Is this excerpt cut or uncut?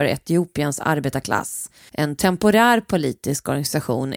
cut